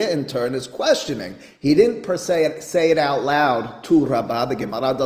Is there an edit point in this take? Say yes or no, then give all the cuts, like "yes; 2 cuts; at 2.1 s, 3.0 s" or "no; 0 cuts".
no; 0 cuts